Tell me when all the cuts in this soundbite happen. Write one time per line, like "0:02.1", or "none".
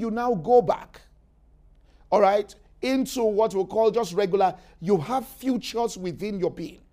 none